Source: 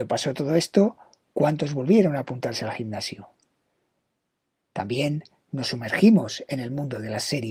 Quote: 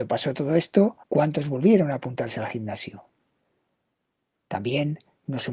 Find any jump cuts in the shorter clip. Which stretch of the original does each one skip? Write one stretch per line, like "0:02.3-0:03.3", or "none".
0:01.0-0:01.3